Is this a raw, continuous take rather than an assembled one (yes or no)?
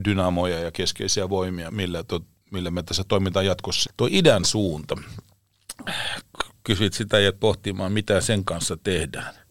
no